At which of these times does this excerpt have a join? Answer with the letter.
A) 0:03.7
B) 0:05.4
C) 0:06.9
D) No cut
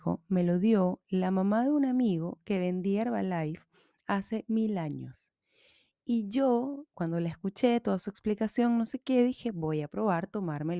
C